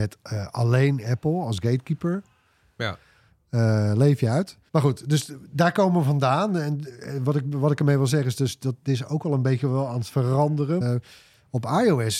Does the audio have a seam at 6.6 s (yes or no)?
no